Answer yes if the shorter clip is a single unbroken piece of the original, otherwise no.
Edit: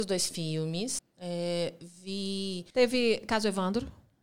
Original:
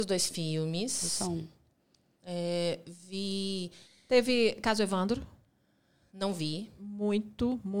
no